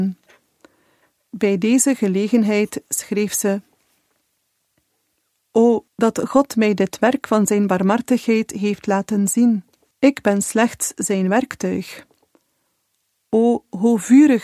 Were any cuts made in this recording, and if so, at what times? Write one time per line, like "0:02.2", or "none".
0:05.9
0:09.9